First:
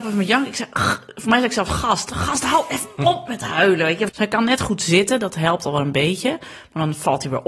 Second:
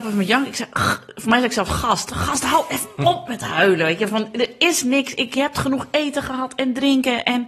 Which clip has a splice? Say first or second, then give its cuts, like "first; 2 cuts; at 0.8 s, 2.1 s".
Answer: first; 1 cut; at 4.1 s